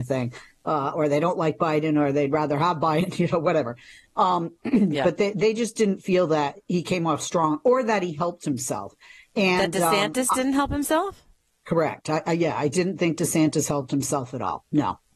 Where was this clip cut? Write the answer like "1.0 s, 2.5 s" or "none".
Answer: none